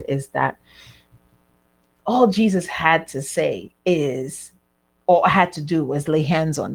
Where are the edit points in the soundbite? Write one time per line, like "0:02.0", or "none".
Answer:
0:03.8